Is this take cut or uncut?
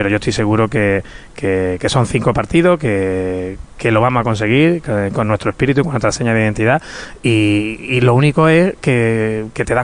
uncut